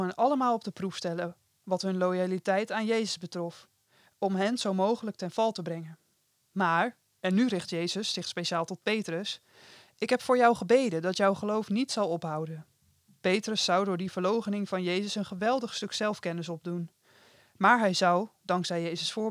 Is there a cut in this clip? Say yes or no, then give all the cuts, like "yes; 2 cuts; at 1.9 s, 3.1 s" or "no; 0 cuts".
no; 0 cuts